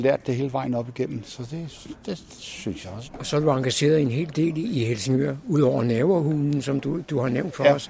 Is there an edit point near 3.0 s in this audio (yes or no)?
yes